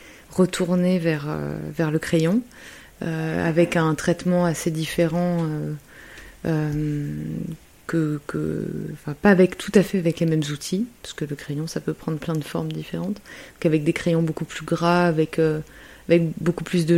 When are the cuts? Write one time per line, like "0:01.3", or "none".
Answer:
none